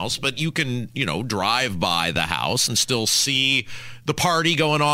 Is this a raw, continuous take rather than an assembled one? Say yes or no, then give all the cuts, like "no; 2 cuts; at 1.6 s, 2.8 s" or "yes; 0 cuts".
yes; 0 cuts